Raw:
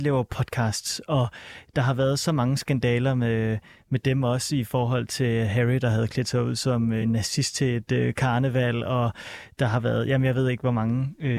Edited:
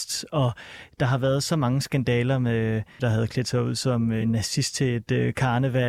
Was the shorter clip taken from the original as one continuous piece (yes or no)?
no